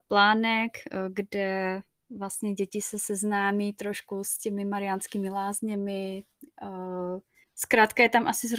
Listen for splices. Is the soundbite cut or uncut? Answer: cut